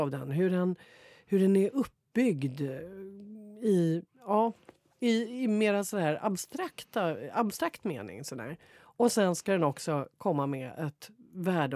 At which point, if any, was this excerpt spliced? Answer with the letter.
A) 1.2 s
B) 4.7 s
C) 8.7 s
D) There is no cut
D